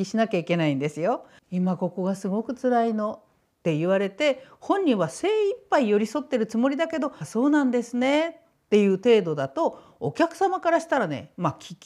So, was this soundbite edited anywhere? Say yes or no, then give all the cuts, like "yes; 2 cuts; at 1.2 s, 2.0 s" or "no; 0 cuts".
yes; 2 cuts; at 1.4 s, 7.2 s